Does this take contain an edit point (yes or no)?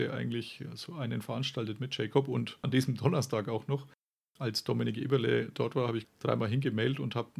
yes